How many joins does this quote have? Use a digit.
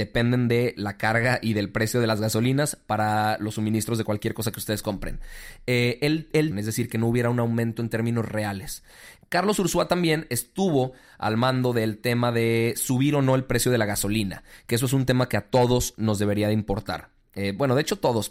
2